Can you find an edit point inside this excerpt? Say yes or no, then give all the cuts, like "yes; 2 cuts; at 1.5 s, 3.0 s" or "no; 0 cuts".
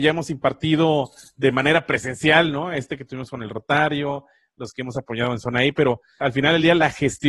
yes; 1 cut; at 6.2 s